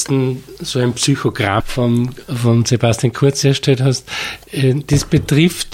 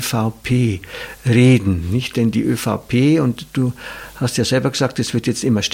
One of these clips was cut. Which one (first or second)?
first